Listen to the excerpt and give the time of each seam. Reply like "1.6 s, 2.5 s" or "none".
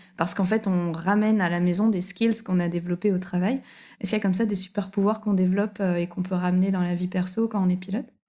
none

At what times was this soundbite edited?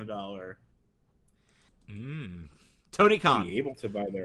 1.7 s

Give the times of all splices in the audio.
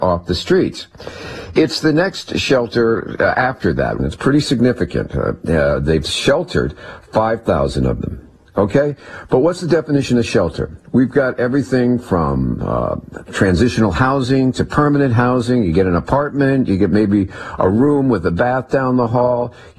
4.0 s

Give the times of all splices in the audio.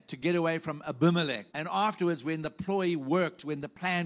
1.5 s

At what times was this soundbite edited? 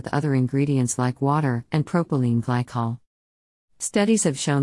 1.7 s

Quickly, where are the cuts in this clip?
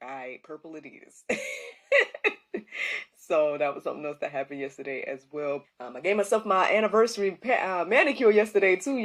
5.6 s

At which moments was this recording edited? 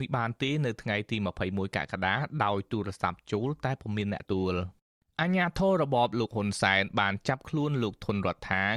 4.2 s

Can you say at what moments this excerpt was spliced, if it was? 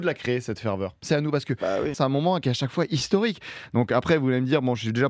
1.9 s

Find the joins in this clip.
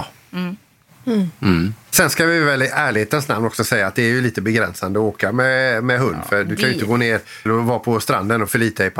7.5 s

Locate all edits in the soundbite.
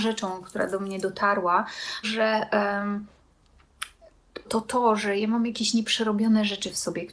2.0 s, 4.4 s

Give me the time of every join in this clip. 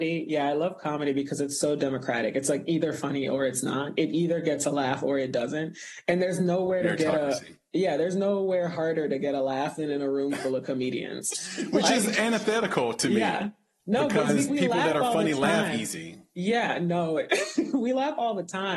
14.5 s

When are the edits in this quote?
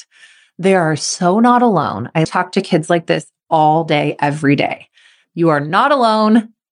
2.2 s

